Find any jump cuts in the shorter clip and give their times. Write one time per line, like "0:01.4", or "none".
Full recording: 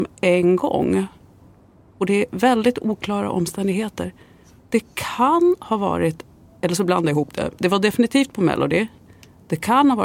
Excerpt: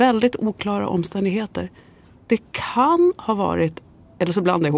none